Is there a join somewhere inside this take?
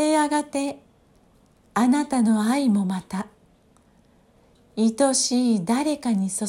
no; 0 cuts

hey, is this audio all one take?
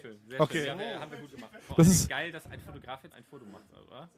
no; 2 cuts; at 1.6 s, 3.1 s

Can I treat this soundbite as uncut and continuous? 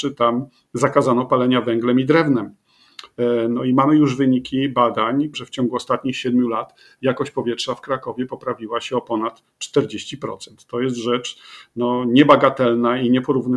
no; 1 cut; at 5.3 s

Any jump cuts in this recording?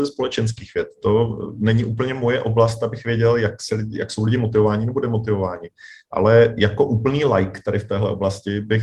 no; 0 cuts

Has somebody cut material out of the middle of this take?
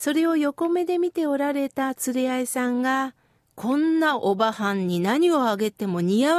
yes; 1 cut; at 3.5 s

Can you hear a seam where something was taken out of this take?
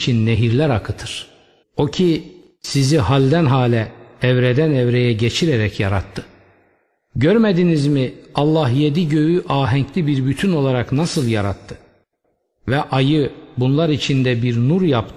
yes; 1 cut; at 1.6 s

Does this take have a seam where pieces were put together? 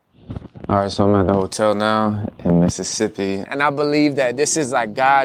yes; 1 cut; at 3.5 s

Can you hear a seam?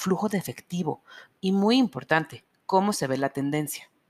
yes; 1 cut; at 1.4 s

